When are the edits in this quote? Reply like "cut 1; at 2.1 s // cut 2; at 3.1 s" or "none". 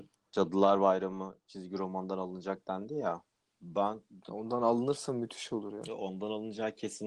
none